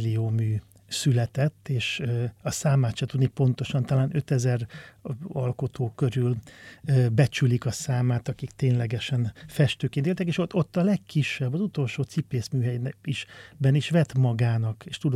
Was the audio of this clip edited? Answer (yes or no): no